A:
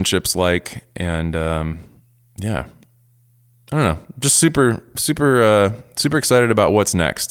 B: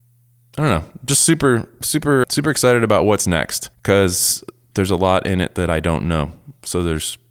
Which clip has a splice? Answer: B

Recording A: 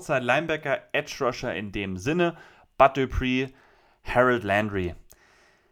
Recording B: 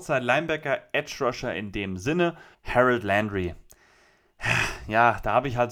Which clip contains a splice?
B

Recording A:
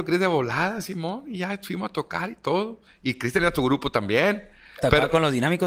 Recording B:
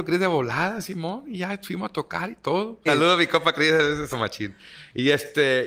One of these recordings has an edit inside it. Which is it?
B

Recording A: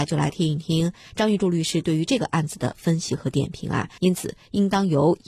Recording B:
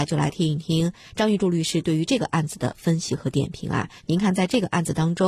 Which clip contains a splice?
A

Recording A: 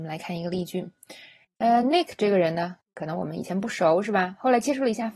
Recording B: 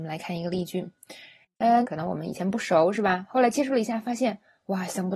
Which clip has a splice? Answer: B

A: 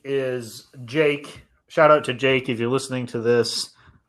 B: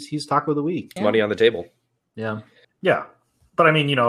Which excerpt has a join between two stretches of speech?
B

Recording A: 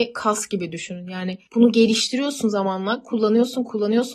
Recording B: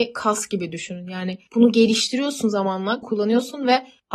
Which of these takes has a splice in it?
B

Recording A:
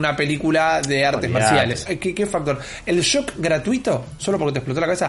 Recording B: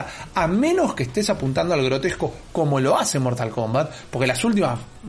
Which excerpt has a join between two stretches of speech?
A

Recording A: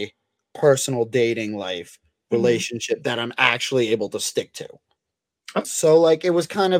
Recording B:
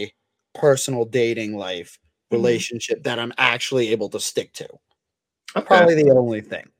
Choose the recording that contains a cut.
A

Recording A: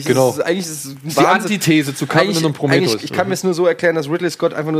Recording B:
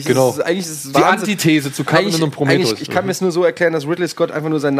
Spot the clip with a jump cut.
B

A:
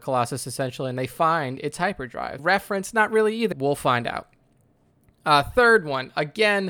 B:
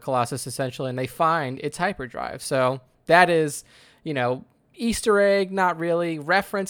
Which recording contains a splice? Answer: A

